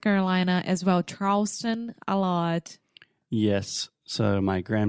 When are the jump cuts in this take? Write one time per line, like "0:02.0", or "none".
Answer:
none